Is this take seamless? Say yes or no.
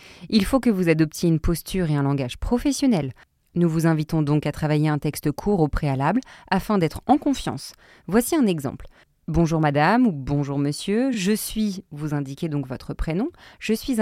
yes